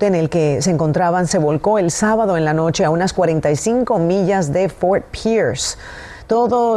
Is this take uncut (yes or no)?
yes